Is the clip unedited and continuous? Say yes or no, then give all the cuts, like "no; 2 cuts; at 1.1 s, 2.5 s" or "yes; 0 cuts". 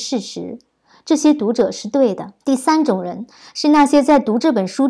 no; 1 cut; at 2.4 s